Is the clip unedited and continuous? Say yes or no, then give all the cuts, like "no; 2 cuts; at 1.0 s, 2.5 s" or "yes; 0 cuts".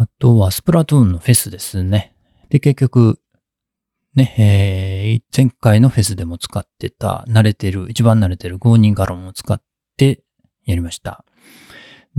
no; 2 cuts; at 2.4 s, 5.3 s